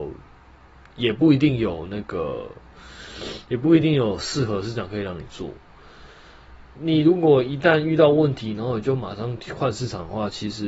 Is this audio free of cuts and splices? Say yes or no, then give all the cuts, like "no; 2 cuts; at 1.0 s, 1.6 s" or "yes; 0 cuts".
no; 1 cut; at 6.8 s